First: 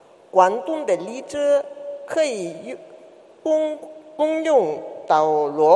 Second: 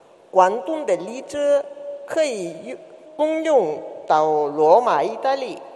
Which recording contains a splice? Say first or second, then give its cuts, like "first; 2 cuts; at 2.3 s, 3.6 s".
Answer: second; 1 cut; at 3.0 s